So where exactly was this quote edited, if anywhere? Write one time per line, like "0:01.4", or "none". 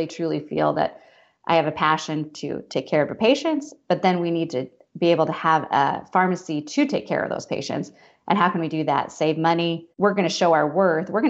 0:09.9